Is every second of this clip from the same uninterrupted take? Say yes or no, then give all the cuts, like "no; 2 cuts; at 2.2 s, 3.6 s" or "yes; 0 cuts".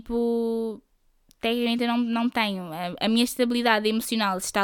yes; 0 cuts